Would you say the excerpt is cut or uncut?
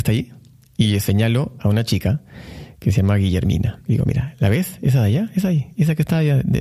uncut